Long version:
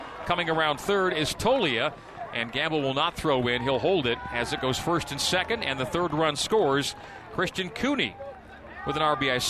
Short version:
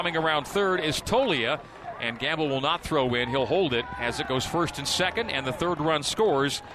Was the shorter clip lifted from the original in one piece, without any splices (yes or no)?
yes